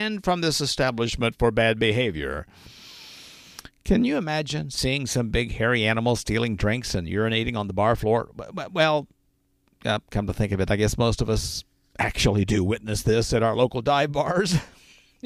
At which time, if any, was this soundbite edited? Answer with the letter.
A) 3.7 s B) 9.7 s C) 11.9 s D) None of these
D